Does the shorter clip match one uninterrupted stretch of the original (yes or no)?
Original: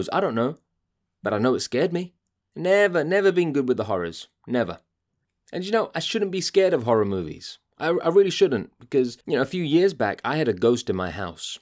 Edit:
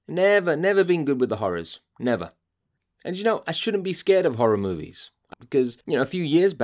no